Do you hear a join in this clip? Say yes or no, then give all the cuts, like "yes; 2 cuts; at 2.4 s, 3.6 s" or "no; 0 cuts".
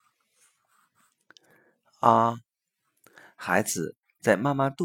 no; 0 cuts